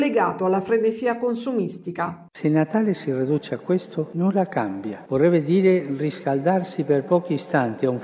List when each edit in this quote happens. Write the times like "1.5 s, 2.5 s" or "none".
5.1 s